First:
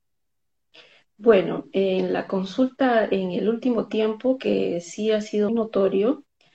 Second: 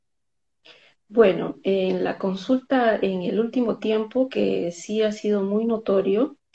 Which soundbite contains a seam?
first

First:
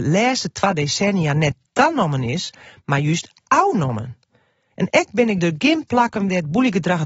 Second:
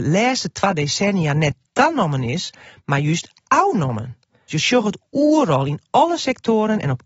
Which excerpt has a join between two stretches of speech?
second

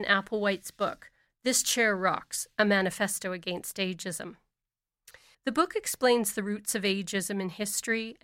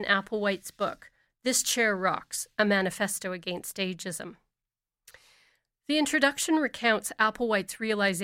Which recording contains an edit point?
first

